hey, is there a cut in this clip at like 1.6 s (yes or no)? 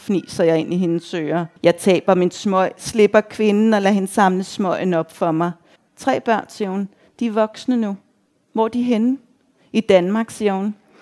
yes